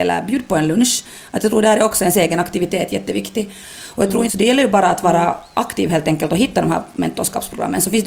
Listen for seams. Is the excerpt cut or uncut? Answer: cut